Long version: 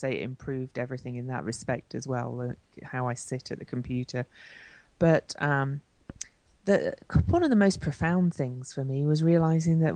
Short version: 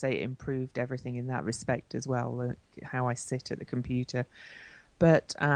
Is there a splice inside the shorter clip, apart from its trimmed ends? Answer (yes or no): no